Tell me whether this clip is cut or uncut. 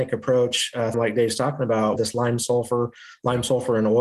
cut